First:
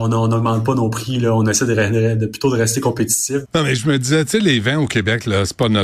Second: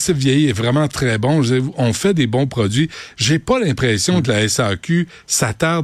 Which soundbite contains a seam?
first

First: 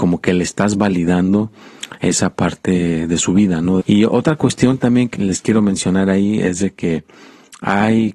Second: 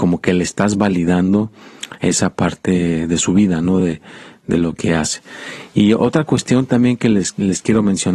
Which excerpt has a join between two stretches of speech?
first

